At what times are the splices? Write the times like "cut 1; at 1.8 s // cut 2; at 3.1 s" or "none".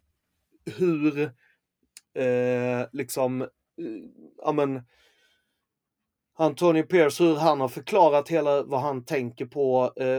none

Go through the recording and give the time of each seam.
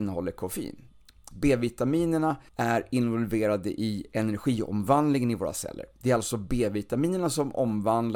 cut 1; at 1.3 s // cut 2; at 2.5 s

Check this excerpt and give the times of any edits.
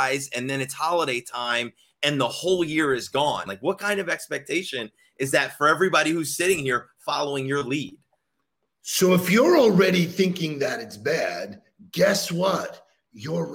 cut 1; at 3.5 s

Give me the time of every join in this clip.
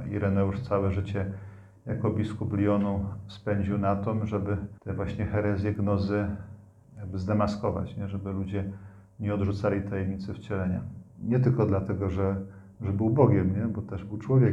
cut 1; at 4.8 s // cut 2; at 11.1 s

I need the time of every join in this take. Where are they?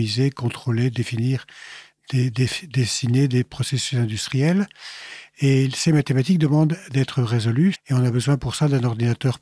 cut 1; at 7.7 s

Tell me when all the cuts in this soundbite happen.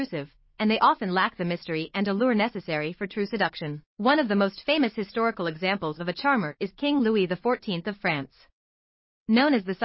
cut 1; at 3.9 s

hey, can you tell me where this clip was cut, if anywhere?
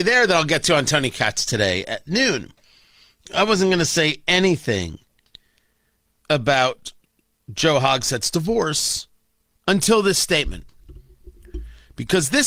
cut 1; at 9.5 s

